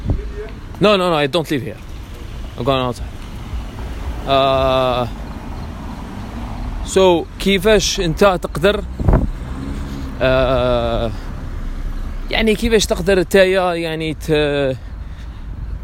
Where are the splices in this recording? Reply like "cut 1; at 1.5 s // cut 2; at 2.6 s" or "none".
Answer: none